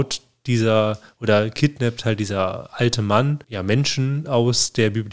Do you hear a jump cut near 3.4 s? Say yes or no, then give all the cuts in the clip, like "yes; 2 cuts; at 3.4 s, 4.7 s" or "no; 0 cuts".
yes; 1 cut; at 3.4 s